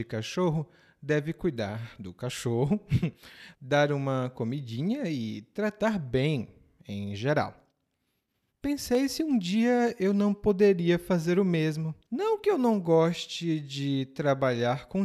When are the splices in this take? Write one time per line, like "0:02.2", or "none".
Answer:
0:03.5
0:08.5
0:12.0